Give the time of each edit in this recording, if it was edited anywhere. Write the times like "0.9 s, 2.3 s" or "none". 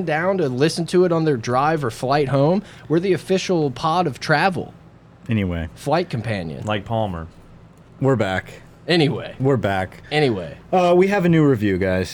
none

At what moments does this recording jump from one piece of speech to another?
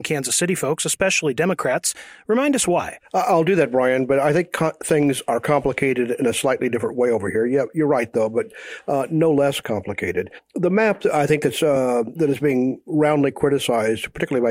none

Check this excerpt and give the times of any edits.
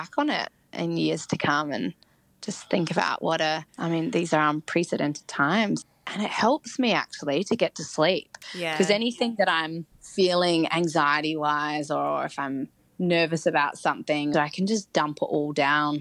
3.7 s, 14.3 s

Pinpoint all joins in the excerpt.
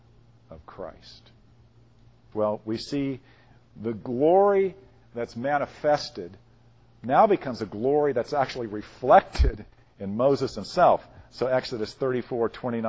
2.3 s

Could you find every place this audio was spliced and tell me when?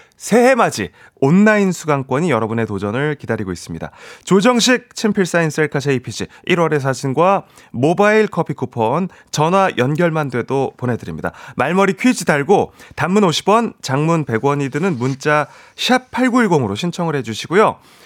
none

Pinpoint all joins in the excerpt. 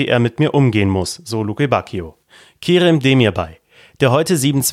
none

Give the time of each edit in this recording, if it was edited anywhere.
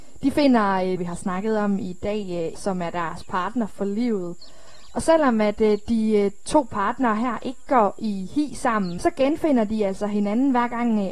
1.0 s, 2.5 s, 9.0 s

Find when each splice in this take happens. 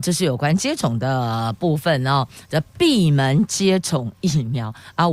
none

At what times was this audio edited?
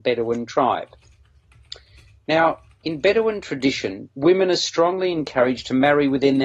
none

